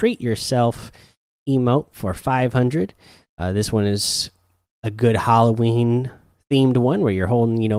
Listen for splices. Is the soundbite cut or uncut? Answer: uncut